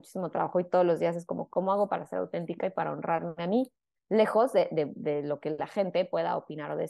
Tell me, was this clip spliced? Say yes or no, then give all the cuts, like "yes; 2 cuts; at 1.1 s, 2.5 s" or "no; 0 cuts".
no; 0 cuts